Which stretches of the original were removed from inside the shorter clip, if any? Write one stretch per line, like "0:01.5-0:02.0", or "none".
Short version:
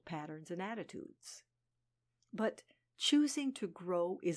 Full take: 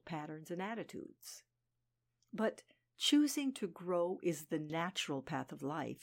none